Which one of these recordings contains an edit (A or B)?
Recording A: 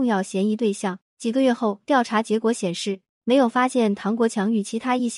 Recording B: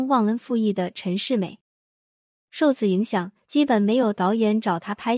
A